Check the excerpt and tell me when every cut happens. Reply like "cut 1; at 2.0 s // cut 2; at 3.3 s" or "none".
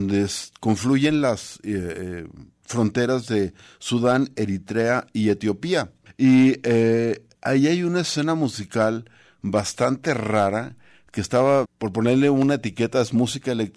cut 1; at 6.1 s // cut 2; at 7.3 s // cut 3; at 11.6 s